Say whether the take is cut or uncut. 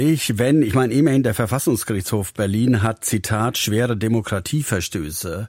uncut